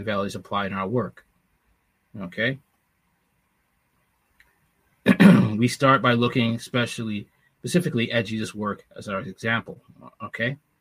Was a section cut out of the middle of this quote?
no; 0 cuts

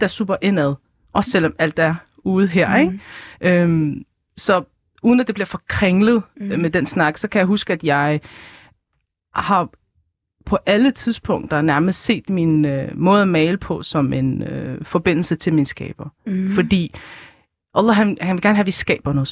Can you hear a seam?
no; 0 cuts

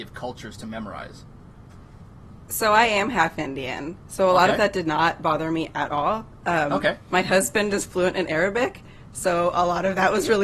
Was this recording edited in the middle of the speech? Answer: no; 0 cuts

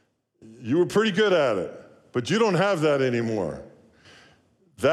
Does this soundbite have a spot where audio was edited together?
no; 0 cuts

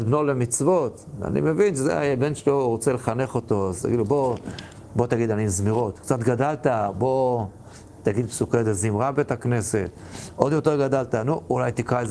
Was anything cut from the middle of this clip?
no; 0 cuts

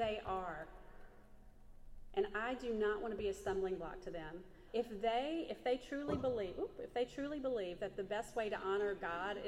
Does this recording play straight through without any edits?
no; 1 cut; at 4.7 s

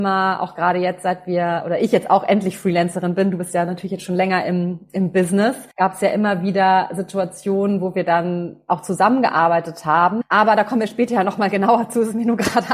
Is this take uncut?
no; 2 cuts; at 5.7 s, 10.2 s

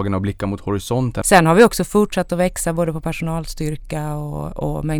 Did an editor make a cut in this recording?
yes; 1 cut; at 1.2 s

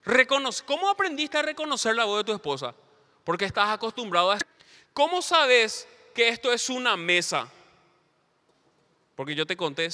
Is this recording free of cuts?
yes; 0 cuts

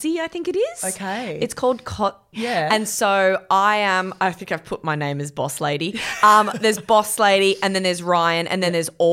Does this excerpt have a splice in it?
yes; 1 cut; at 2.3 s

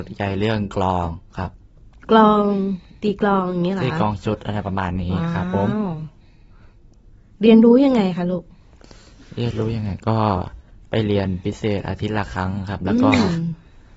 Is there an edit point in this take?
no; 0 cuts

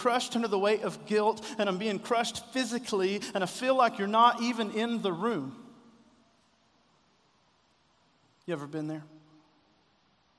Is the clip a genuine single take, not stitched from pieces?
yes; 0 cuts

